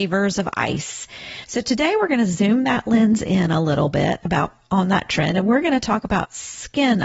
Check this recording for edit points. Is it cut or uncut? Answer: uncut